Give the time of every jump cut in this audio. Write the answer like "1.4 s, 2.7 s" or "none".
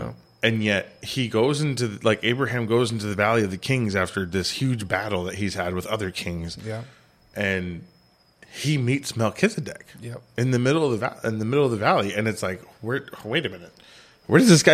none